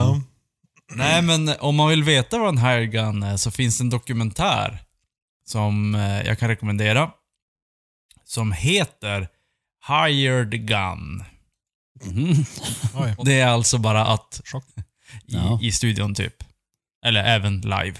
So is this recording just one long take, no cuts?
no; 2 cuts; at 13.2 s, 14.7 s

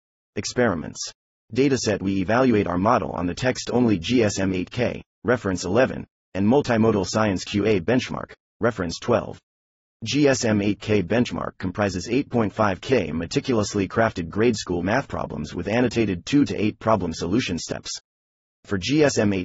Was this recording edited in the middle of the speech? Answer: no; 0 cuts

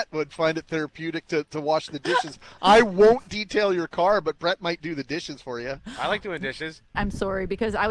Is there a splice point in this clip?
yes; 1 cut; at 6.9 s

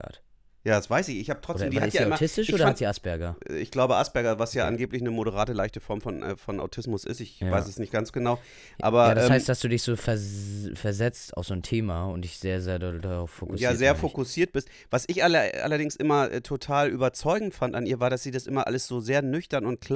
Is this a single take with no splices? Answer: yes; 0 cuts

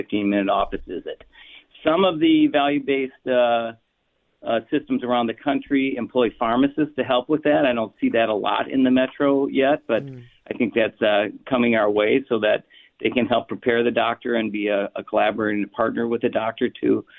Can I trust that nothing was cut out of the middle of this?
yes; 0 cuts

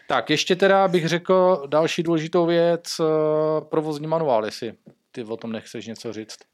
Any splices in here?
no; 0 cuts

